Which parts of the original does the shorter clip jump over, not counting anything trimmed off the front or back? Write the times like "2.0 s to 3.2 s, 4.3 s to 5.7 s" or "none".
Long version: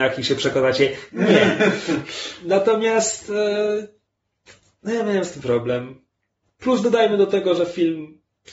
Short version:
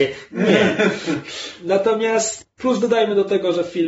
3.2 s to 6.4 s

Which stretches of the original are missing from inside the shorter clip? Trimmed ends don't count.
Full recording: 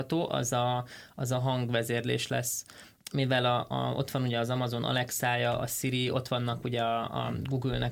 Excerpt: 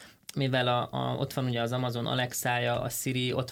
none

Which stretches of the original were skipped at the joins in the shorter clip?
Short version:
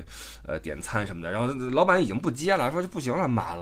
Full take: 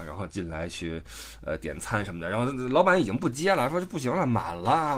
none

